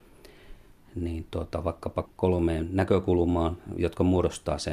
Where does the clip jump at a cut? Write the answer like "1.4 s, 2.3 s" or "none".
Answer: 2.1 s